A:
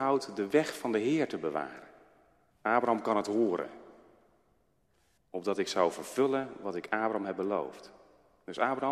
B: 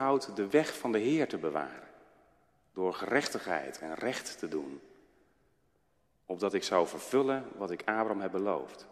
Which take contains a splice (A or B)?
A